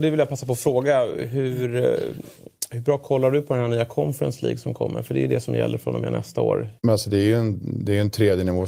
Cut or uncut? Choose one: cut